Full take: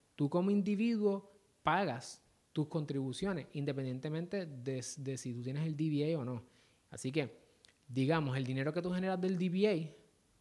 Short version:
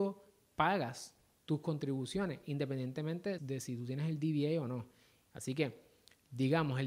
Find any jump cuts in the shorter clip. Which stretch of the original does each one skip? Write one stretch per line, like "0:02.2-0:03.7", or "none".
0:04.5-0:05.0